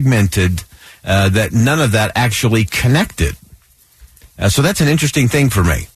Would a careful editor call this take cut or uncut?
uncut